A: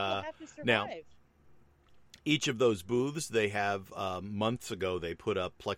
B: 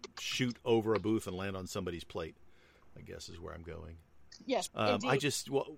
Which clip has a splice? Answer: B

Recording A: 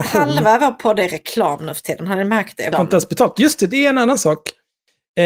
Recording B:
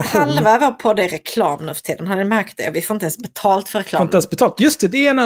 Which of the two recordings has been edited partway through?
A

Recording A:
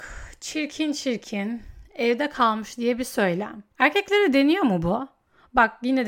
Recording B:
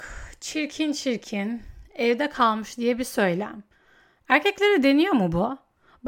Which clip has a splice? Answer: A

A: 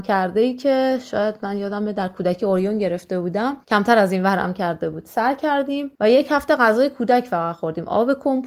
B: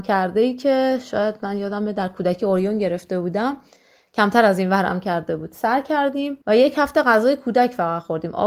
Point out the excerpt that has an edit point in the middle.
A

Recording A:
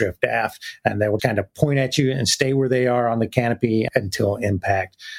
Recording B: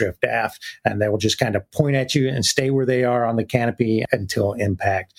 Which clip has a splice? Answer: A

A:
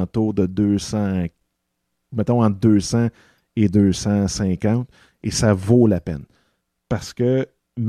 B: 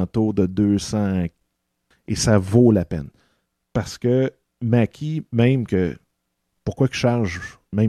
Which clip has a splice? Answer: B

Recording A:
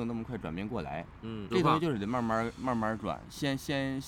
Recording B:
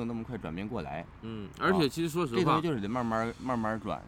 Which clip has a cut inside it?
A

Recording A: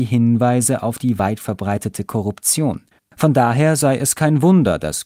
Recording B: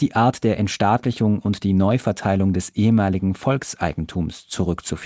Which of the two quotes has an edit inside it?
A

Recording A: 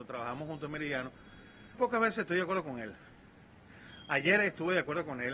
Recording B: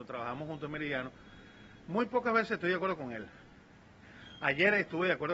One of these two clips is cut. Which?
A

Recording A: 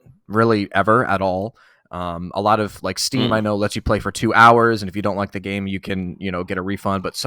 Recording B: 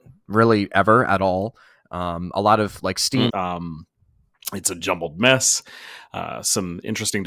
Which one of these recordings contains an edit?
B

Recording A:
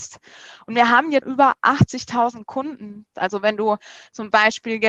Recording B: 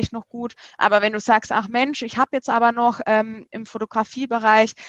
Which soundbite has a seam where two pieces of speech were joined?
A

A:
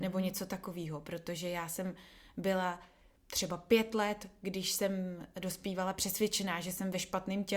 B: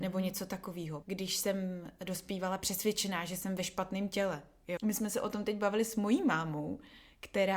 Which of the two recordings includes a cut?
B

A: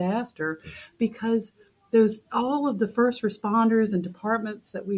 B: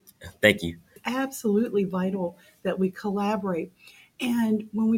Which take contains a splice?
B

